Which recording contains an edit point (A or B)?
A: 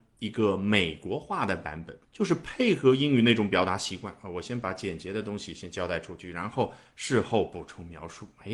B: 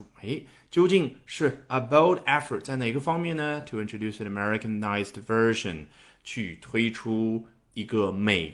A